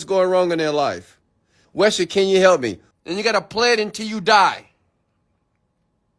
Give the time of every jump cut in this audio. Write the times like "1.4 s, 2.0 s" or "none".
1.6 s, 2.9 s